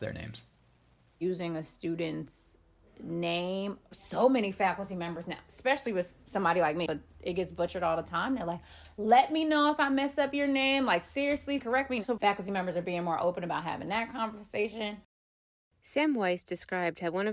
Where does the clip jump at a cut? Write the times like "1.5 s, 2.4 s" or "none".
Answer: 6.9 s, 11.6 s